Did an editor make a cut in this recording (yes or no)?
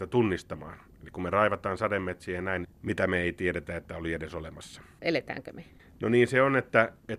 yes